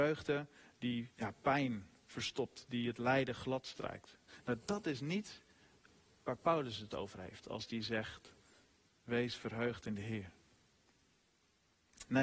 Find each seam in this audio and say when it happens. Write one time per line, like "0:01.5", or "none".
0:01.1